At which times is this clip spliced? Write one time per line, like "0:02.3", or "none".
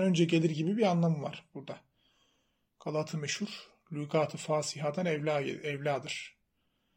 none